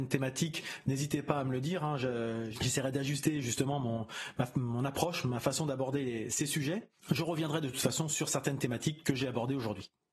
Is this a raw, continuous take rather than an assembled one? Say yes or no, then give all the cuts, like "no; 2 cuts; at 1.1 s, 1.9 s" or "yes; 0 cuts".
no; 1 cut; at 7.0 s